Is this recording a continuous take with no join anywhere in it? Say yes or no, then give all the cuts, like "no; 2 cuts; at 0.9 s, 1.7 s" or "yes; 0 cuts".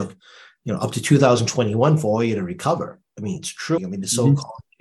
no; 1 cut; at 3.8 s